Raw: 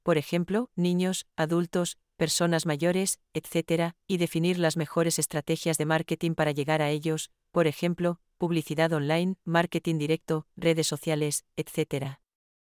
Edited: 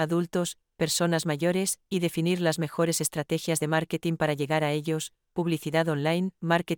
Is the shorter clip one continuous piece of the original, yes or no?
no